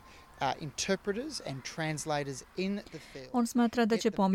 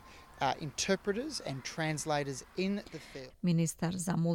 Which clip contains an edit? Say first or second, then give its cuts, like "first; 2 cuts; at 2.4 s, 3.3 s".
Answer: second; 1 cut; at 3.3 s